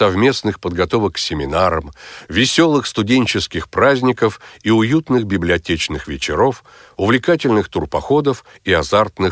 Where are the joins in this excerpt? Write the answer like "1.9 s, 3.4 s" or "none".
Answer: none

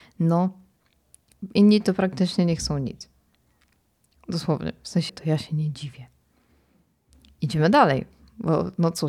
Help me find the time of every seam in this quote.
5.1 s

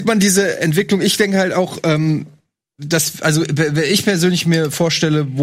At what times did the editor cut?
none

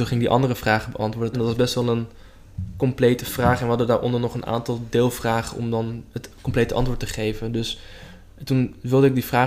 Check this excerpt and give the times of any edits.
1.3 s

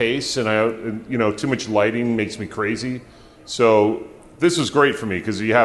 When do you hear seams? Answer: none

